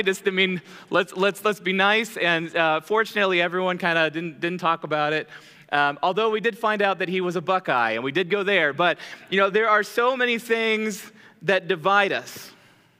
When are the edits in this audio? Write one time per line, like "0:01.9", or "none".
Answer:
none